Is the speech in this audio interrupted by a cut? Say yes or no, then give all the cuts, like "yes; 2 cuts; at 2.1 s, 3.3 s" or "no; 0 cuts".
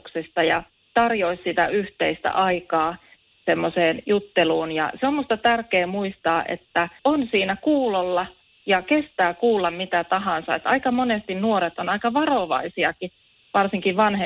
no; 0 cuts